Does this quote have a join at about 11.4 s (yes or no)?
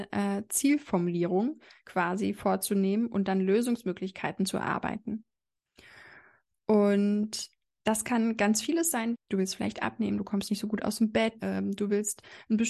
yes